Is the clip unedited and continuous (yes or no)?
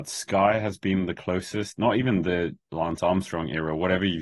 yes